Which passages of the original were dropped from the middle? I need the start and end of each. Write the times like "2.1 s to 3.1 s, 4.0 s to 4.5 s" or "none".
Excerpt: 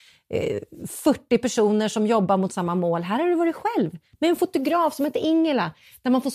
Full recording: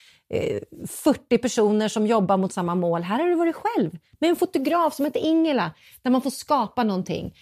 none